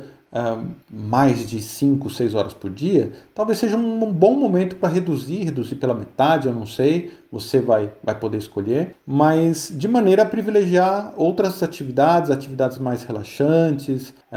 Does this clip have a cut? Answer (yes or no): no